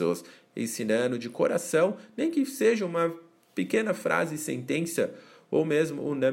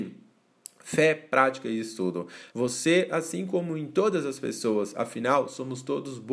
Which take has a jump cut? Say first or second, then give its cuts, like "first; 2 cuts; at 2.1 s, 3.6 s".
second; 1 cut; at 2.5 s